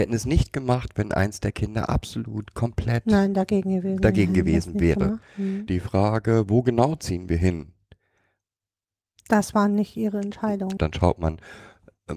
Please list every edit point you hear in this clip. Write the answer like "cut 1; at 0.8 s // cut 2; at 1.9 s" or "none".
cut 1; at 5.7 s // cut 2; at 10.8 s